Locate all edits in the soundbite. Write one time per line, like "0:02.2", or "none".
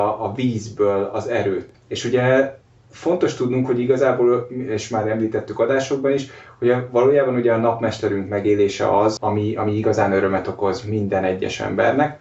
0:01.7
0:09.2